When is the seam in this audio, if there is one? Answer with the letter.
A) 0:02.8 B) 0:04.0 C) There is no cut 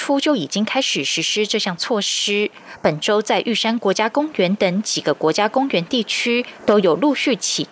C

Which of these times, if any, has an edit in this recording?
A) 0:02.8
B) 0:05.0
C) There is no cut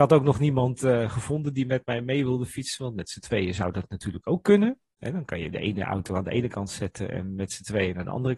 C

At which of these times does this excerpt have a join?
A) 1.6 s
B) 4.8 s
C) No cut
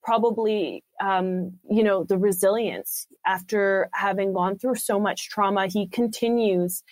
A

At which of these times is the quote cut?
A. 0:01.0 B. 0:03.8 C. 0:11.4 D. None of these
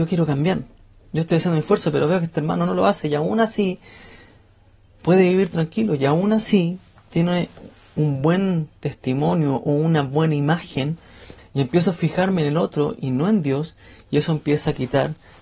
C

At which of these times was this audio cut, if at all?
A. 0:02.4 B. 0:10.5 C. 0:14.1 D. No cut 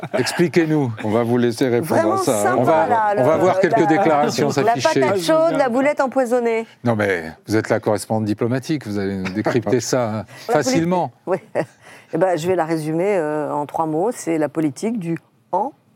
B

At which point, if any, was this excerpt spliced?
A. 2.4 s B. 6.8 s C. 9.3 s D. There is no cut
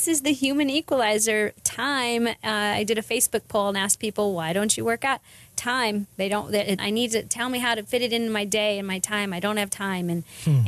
B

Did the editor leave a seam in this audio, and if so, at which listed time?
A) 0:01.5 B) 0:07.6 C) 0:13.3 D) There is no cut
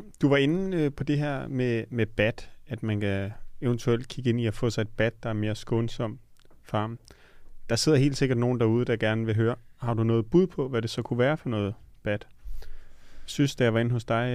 D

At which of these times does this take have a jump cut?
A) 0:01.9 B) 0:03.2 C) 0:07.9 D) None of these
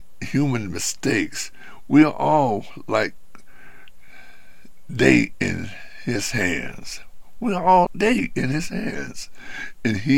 C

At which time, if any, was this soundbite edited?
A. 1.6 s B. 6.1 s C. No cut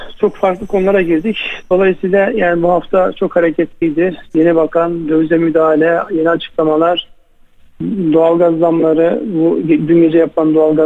C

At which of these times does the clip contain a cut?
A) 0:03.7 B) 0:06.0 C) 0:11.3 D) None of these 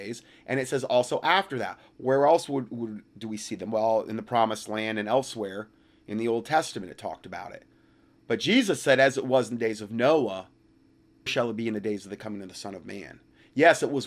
C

